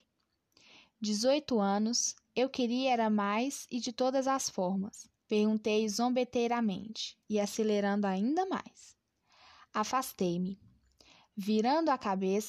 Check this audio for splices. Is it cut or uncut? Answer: cut